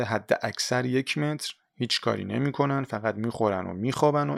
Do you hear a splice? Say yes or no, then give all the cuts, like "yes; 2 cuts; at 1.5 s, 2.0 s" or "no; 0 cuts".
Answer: no; 0 cuts